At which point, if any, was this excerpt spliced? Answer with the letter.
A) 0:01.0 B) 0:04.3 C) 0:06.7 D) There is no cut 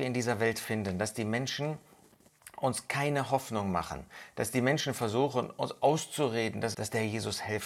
C